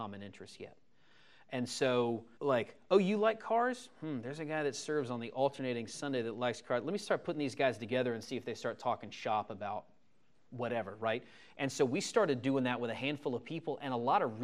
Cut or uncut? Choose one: cut